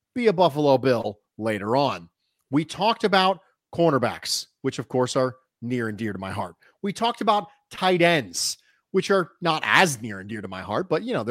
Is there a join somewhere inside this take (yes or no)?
no